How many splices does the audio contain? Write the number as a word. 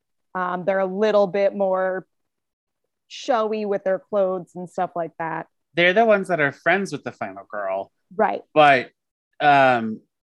zero